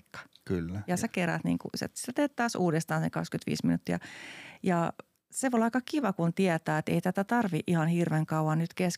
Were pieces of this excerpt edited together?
no; 0 cuts

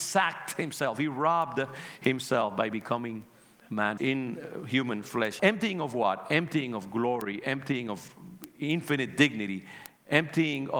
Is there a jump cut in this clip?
yes; 2 cuts; at 4.0 s, 5.4 s

